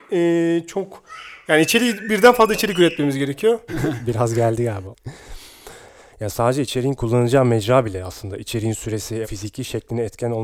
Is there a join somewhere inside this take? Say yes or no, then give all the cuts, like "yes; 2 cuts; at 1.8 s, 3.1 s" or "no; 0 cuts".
yes; 3 cuts; at 3.7 s, 4.9 s, 9.2 s